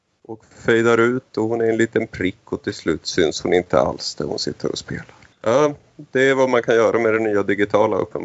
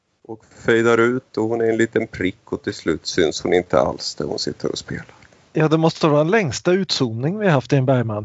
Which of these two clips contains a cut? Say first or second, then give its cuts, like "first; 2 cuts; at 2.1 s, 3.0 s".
first; 1 cut; at 5.3 s